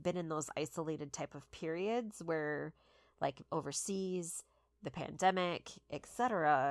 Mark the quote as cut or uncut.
uncut